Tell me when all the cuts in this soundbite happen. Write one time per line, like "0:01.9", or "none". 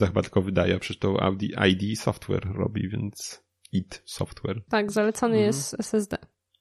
0:04.7